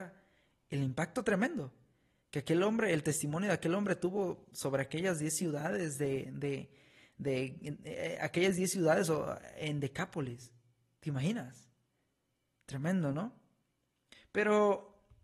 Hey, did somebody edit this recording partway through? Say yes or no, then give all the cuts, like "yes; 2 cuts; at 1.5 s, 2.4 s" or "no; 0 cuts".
no; 0 cuts